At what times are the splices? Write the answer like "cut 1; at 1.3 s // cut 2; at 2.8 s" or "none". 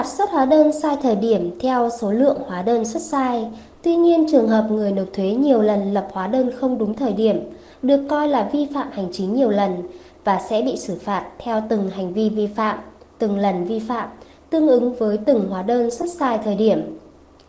cut 1; at 3.7 s